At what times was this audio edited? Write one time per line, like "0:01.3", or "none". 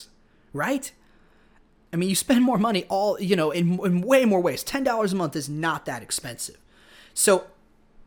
none